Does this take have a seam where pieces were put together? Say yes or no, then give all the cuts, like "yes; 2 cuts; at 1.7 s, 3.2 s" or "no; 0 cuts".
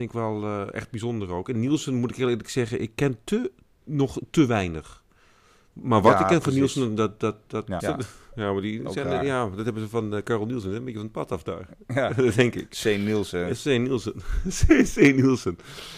yes; 1 cut; at 7.8 s